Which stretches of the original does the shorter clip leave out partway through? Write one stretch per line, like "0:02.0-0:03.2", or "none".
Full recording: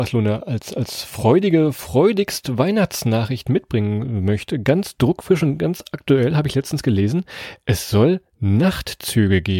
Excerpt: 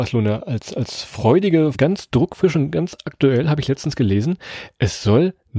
0:01.7-0:04.6